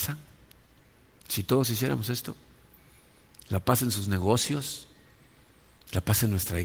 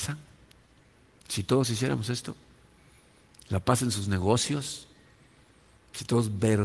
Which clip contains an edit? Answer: second; 1 cut; at 5.7 s

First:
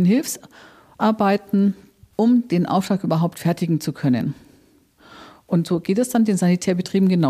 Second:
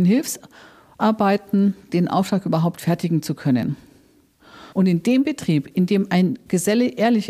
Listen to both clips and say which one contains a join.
second; 2 cuts; at 1.9 s, 4.7 s

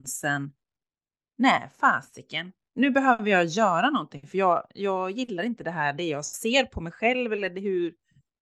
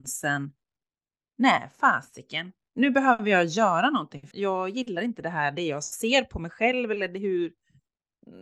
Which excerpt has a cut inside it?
second; 1 cut; at 4.3 s

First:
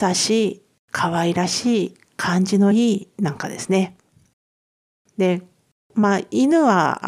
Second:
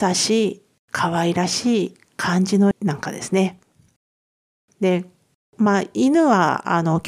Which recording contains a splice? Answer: second; 1 cut; at 2.7 s

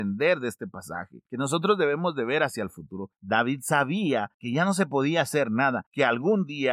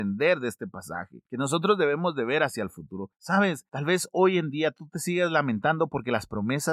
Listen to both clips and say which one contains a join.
first; 1 cut; at 3.2 s

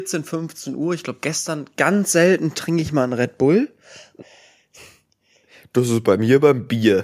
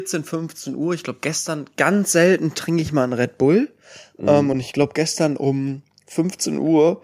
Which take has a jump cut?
first; 1 cut; at 4.2 s

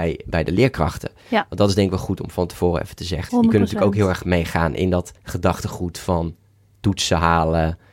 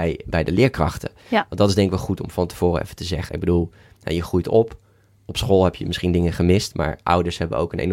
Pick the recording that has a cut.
first; 2 cuts; at 3.3 s, 5.2 s

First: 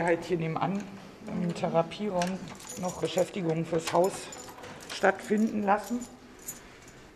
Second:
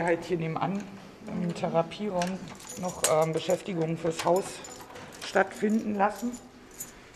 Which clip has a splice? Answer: first; 1 cut; at 3.0 s

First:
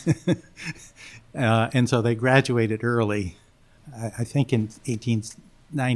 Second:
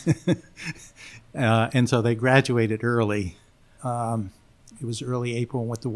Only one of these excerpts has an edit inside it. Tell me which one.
second; 1 cut; at 3.8 s

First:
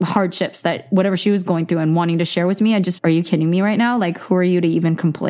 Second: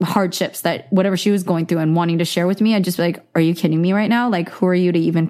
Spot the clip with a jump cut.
first; 1 cut; at 3.0 s

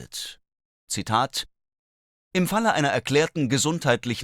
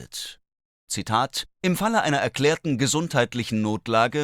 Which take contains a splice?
second; 1 cut; at 1.5 s

